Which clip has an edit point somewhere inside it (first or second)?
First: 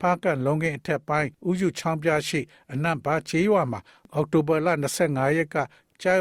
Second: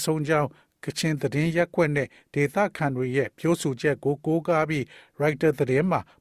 first